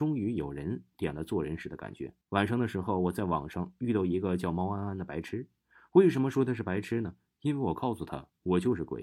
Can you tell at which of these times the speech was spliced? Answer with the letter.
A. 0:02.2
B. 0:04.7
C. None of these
A